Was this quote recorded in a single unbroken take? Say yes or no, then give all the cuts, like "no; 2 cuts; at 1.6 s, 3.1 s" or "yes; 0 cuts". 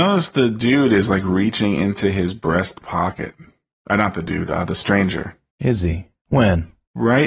yes; 0 cuts